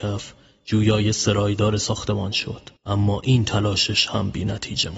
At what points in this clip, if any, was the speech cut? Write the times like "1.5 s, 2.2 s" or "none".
2.8 s